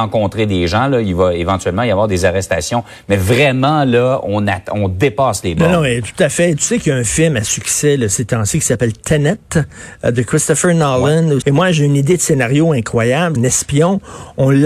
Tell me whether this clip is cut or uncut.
cut